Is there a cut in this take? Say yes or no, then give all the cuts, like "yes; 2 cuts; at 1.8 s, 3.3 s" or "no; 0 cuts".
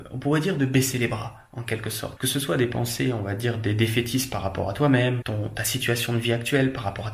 yes; 2 cuts; at 2.2 s, 5.2 s